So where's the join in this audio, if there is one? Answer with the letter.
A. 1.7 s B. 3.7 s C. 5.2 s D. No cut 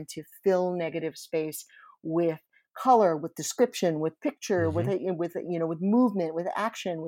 D